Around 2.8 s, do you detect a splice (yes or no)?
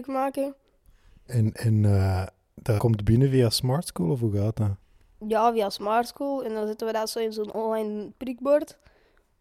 yes